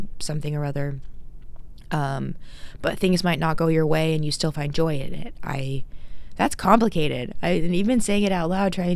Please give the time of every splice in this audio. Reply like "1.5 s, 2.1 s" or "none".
none